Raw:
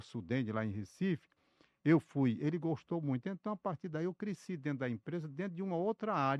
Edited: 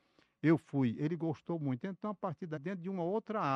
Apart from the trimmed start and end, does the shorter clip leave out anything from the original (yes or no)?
yes